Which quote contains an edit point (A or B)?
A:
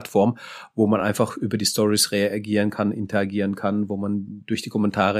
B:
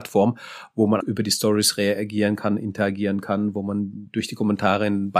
B